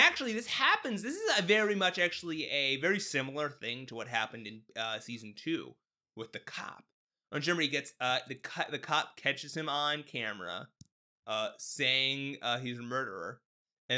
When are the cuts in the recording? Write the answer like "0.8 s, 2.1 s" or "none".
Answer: none